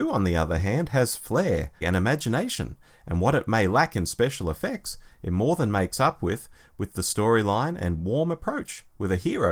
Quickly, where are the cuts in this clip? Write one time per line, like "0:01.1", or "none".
0:01.8